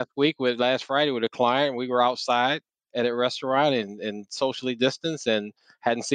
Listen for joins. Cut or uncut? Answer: uncut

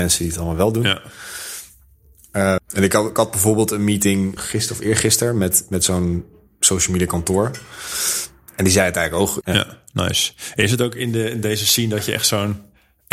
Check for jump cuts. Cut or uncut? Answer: cut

